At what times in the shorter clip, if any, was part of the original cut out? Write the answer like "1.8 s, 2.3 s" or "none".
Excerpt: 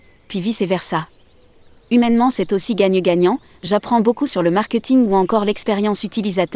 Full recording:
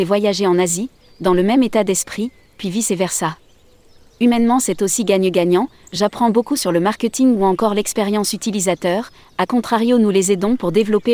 none